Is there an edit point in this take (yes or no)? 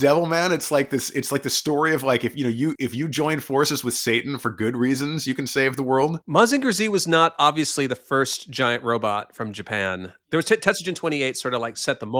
yes